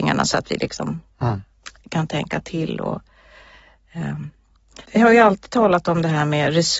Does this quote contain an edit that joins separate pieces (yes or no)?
yes